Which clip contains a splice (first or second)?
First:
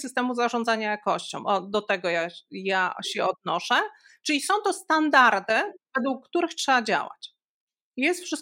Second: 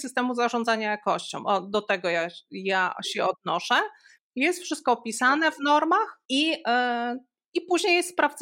second